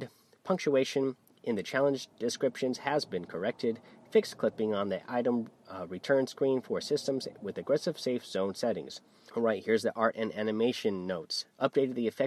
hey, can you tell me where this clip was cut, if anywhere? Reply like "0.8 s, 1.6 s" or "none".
9.3 s